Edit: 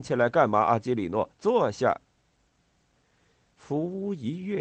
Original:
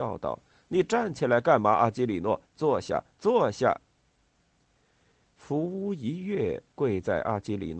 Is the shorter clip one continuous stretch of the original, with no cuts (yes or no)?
no